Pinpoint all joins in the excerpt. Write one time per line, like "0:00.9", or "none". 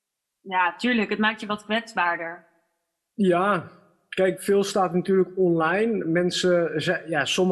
0:04.4